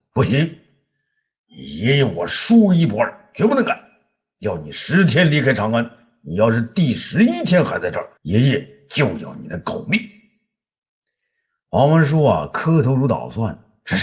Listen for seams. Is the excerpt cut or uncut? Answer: cut